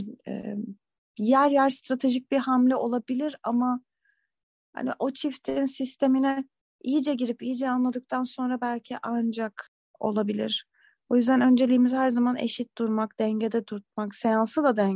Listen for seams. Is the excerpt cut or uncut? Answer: uncut